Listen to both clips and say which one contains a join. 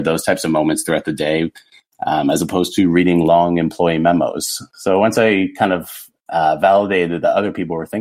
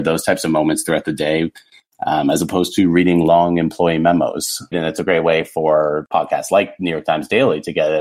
second; 1 cut; at 4.7 s

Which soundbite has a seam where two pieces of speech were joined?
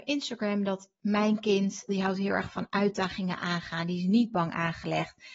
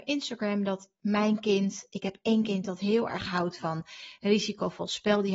first; 1 cut; at 1.9 s

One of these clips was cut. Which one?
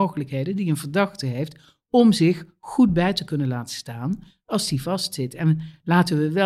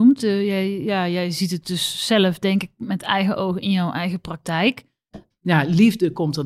second; 1 cut; at 5.3 s

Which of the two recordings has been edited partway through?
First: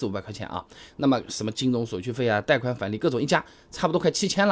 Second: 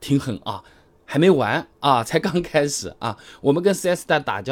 second; 1 cut; at 2.2 s

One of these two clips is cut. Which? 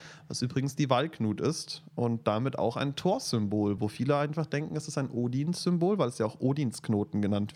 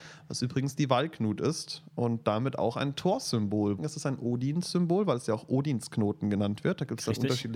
second; 1 cut; at 3.8 s

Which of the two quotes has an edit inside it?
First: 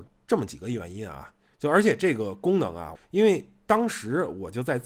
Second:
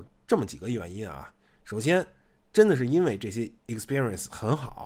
first; 2 cuts; at 1.5 s, 2.9 s

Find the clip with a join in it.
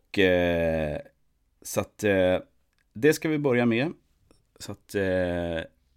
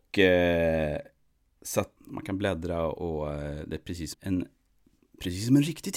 second; 2 cuts; at 2.0 s, 4.1 s

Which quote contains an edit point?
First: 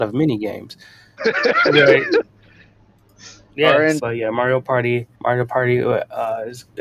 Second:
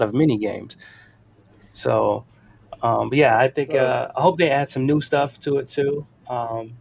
first; 3 cuts; at 1.2 s, 4.0 s, 5.1 s

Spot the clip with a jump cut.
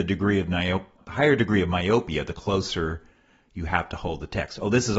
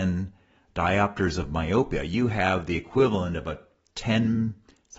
first; 1 cut; at 1.0 s

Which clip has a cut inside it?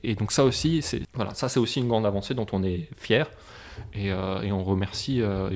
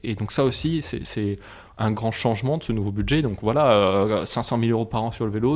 first; 1 cut; at 1.0 s

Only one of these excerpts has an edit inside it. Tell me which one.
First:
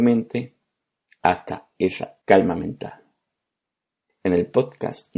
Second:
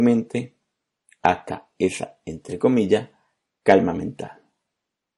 first; 1 cut; at 2.2 s

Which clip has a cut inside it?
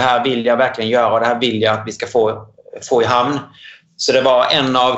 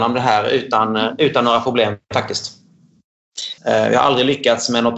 second; 1 cut; at 3.6 s

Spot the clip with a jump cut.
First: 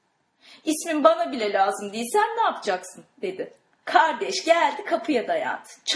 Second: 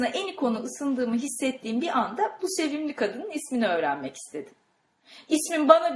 first; 1 cut; at 3.8 s

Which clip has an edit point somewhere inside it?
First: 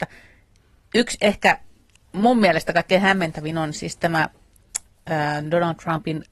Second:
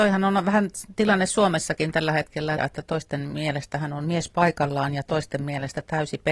second; 1 cut; at 2.6 s

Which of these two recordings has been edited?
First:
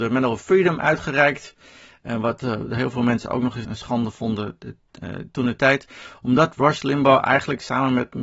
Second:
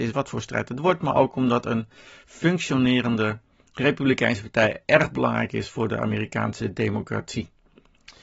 first; 1 cut; at 3.6 s

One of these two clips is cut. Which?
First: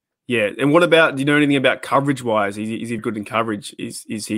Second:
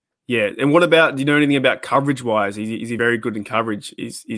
first; 1 cut; at 3.0 s

